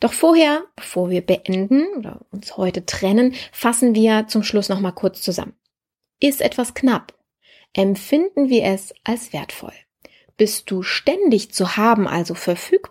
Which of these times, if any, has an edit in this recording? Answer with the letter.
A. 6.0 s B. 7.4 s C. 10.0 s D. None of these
D